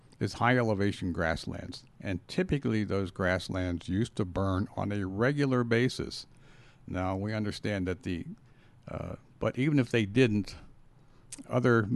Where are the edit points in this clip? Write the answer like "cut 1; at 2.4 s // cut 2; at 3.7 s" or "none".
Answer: cut 1; at 9.3 s